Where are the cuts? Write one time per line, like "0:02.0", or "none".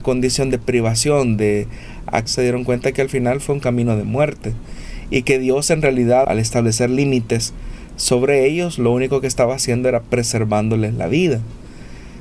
0:02.3
0:06.2